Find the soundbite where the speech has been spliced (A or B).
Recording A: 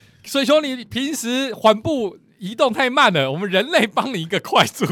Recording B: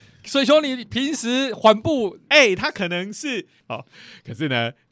B